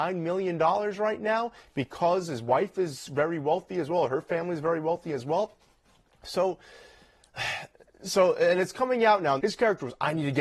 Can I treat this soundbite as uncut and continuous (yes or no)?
no